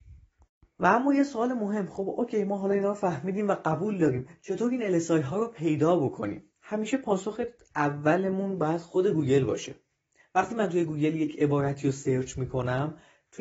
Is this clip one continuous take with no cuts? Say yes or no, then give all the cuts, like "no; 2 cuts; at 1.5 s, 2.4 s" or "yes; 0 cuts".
no; 1 cut; at 6.5 s